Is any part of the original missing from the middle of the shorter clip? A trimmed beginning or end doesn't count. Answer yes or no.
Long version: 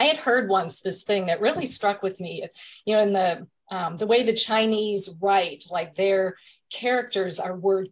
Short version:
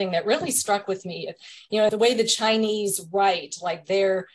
yes